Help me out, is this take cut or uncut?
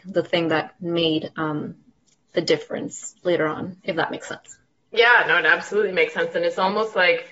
uncut